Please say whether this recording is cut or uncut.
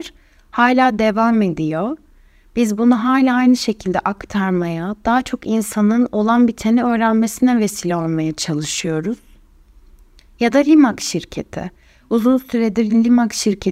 uncut